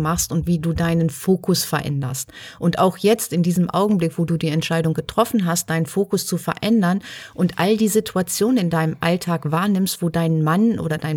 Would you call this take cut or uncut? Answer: uncut